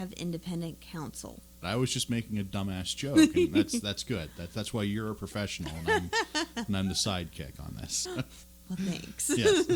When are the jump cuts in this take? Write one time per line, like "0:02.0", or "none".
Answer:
0:01.6
0:08.1